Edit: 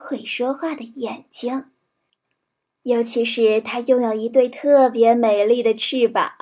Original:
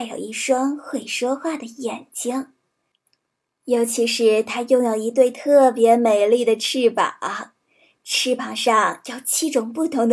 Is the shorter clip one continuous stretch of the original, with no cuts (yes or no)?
yes